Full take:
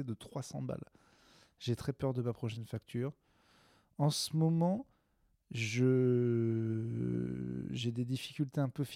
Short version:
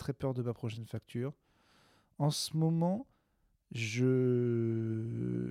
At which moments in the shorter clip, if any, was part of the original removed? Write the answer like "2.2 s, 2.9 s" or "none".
none